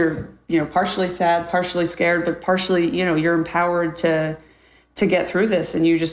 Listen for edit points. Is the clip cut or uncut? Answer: uncut